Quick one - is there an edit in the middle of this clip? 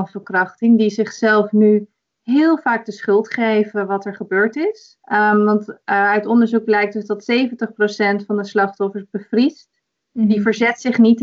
yes; 1 cut; at 5.0 s

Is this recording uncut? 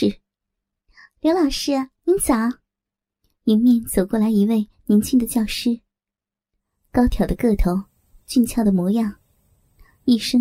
yes; 0 cuts

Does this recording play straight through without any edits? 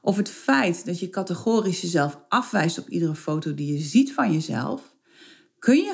yes; 0 cuts

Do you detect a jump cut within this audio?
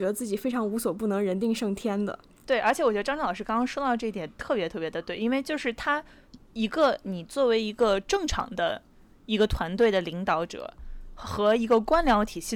no; 0 cuts

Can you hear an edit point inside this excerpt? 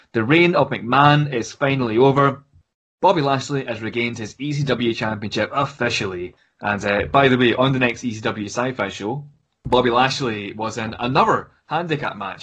no; 0 cuts

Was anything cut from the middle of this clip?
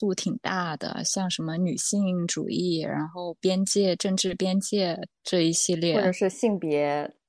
no; 0 cuts

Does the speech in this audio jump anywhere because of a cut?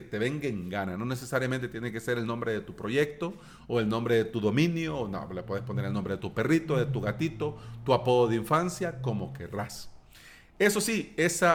no; 0 cuts

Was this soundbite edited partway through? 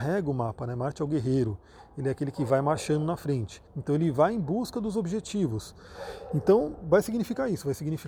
yes; 1 cut; at 3.7 s

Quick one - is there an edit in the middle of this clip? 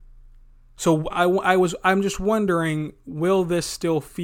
no; 0 cuts

